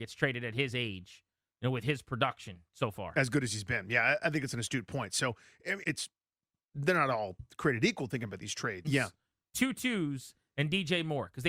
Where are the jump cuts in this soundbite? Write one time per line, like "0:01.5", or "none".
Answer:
0:05.8
0:08.8